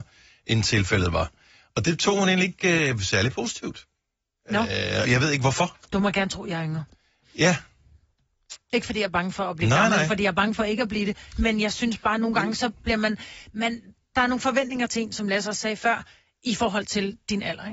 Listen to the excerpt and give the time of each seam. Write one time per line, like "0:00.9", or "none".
0:05.0